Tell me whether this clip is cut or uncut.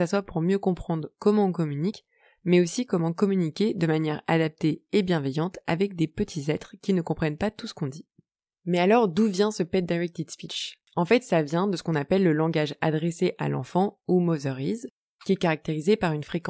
uncut